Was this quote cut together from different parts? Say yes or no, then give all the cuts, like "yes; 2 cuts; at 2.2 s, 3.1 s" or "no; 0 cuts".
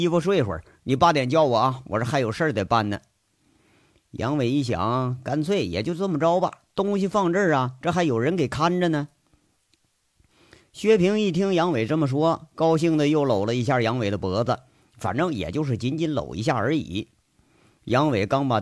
no; 0 cuts